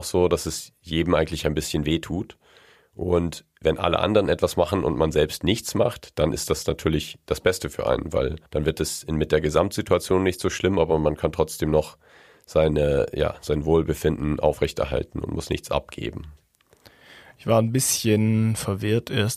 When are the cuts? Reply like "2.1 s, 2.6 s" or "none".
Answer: 8.5 s